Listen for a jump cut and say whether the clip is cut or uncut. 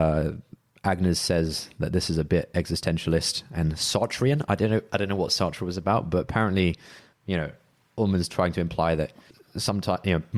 cut